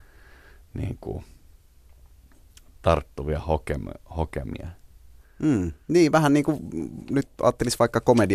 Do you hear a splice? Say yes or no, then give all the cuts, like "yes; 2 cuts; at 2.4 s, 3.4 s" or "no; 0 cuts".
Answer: no; 0 cuts